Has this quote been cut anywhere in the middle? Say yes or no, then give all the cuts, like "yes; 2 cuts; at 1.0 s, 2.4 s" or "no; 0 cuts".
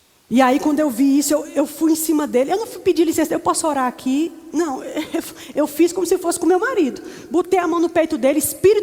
no; 0 cuts